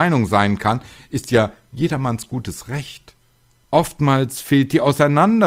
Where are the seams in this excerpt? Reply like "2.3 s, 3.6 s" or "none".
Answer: 3.6 s

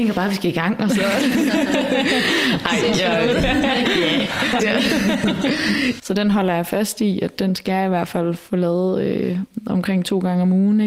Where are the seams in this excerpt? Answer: 4.6 s, 6.0 s

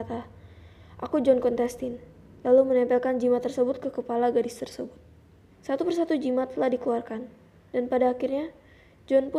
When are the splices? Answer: 5.5 s

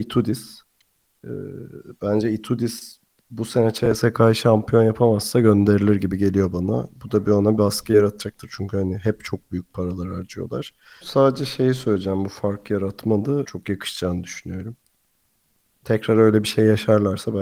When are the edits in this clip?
11.0 s, 13.4 s, 15.8 s

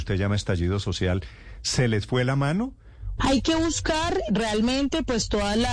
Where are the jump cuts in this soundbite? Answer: 3.2 s, 4.3 s

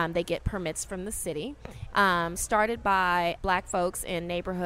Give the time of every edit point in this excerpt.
1.9 s, 3.4 s

